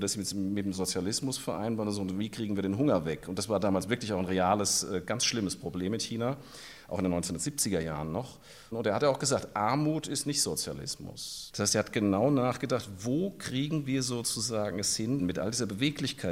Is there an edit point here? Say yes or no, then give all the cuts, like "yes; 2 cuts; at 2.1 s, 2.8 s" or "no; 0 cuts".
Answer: yes; 2 cuts; at 11.5 s, 15.2 s